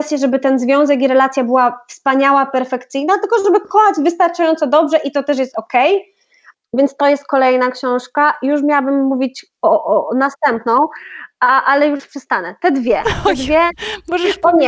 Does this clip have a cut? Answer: no; 0 cuts

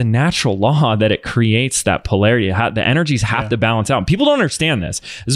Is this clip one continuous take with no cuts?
yes; 0 cuts

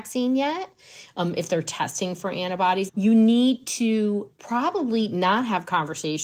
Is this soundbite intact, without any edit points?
no; 1 cut; at 2.9 s

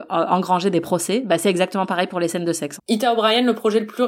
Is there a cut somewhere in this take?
yes; 1 cut; at 2.8 s

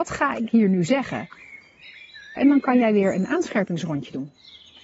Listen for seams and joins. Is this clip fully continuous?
no; 1 cut; at 2.4 s

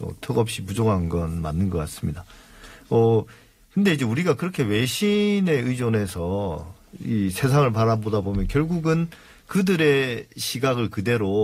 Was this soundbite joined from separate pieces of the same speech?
no; 0 cuts

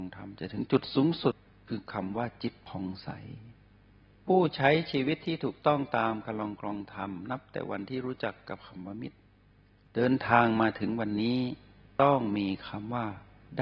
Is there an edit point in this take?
no; 0 cuts

